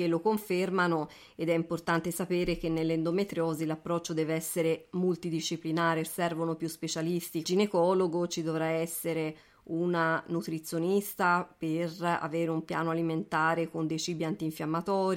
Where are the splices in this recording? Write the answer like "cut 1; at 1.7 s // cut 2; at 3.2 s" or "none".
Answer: cut 1; at 6.1 s // cut 2; at 7.4 s